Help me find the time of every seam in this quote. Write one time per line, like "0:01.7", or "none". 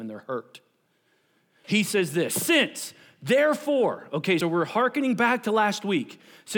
0:01.6
0:04.4